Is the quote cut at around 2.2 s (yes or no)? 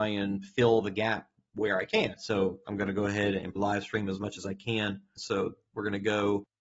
yes